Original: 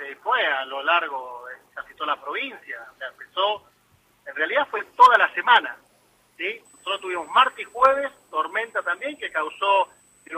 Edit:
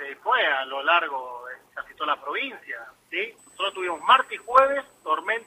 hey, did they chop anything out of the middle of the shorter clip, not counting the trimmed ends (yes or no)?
yes